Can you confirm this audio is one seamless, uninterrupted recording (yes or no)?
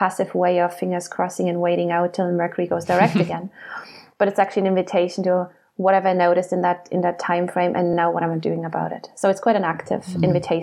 yes